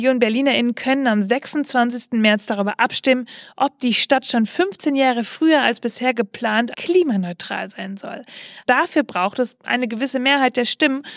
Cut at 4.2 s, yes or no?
no